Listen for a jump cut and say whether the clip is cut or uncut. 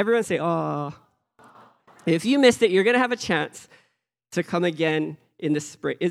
uncut